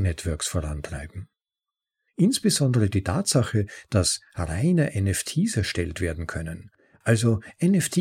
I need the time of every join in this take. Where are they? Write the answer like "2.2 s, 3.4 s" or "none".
2.1 s